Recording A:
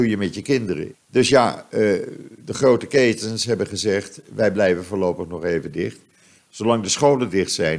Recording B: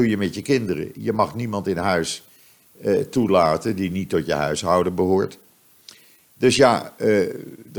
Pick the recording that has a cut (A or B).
A